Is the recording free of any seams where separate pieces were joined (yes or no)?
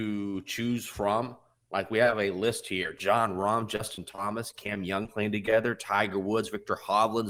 yes